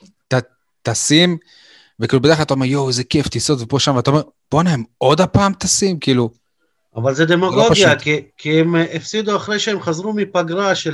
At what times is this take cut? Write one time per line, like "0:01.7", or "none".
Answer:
none